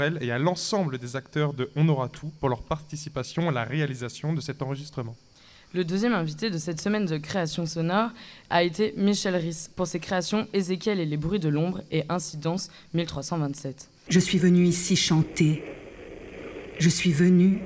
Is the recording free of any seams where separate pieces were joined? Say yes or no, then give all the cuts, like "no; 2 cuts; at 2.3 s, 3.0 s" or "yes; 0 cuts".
no; 1 cut; at 14.1 s